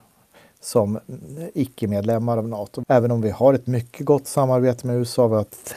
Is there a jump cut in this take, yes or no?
no